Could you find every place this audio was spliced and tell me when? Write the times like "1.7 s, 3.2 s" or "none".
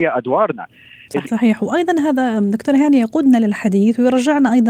1.2 s